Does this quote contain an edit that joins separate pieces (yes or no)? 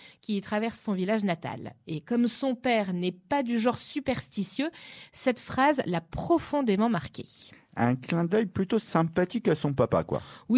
no